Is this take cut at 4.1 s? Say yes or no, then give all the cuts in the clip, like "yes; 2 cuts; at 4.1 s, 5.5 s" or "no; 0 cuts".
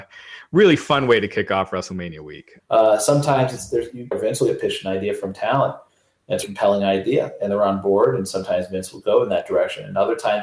yes; 3 cuts; at 2.6 s, 4.1 s, 6.4 s